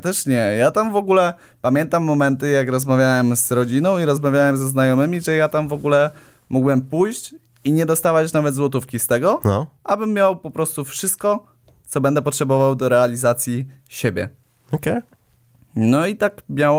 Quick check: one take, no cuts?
yes; 0 cuts

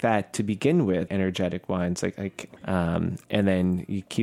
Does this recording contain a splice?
yes; 2 cuts; at 1.1 s, 2.6 s

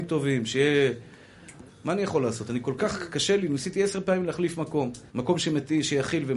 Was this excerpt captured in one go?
no; 2 cuts; at 1.7 s, 5.1 s

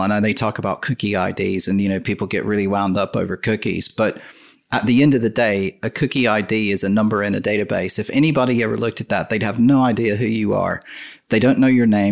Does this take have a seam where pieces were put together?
no; 0 cuts

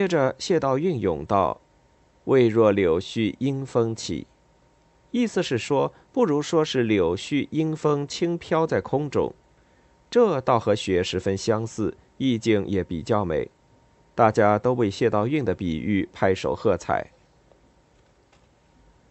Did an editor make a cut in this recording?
no; 0 cuts

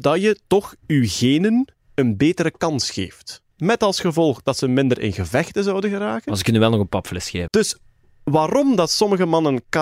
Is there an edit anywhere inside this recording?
yes; 2 cuts; at 3.5 s, 7.5 s

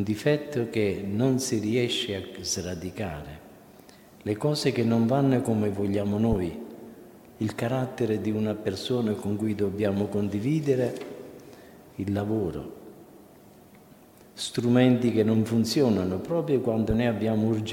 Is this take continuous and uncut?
no; 1 cut; at 7.3 s

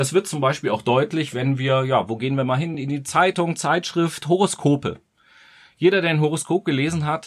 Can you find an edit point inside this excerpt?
no; 0 cuts

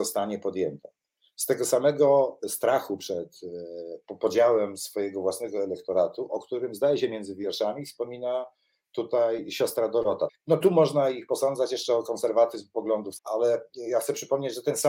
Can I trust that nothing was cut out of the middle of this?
no; 2 cuts; at 10.3 s, 13.2 s

